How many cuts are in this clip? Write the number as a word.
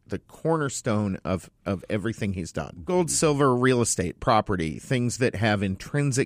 one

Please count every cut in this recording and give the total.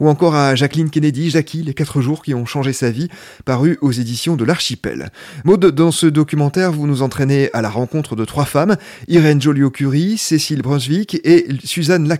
zero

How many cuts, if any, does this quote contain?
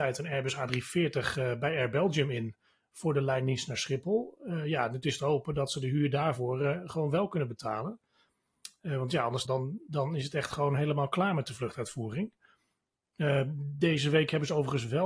one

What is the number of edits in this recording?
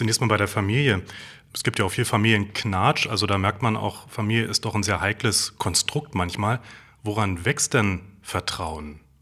zero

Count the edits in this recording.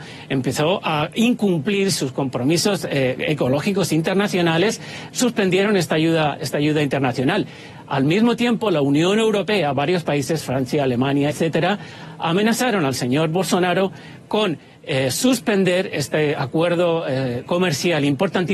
one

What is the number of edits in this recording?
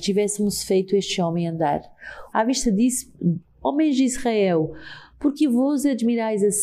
two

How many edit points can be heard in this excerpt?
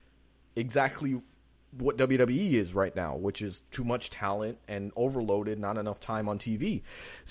zero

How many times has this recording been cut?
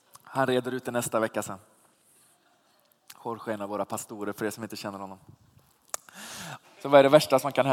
one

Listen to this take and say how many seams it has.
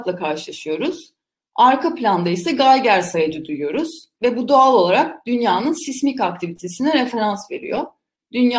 one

